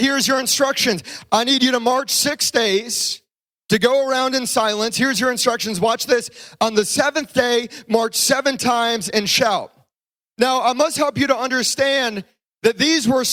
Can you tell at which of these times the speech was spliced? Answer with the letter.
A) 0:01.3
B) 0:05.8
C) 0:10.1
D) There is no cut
D